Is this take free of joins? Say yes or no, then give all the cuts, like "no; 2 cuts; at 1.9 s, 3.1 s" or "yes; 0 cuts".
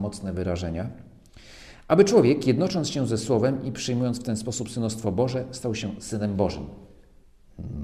yes; 0 cuts